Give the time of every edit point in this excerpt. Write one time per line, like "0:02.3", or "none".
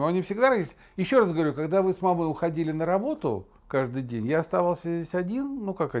none